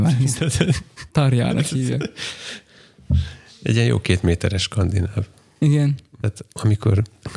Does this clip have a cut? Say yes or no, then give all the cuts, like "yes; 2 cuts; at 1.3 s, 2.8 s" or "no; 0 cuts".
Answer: yes; 1 cut; at 6.2 s